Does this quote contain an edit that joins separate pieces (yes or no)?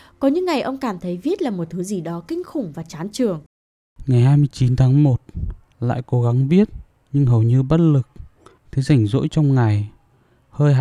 yes